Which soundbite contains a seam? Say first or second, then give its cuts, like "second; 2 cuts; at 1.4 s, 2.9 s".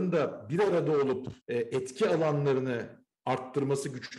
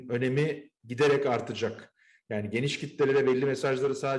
first; 1 cut; at 1.4 s